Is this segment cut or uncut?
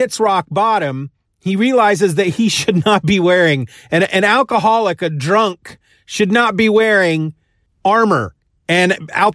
uncut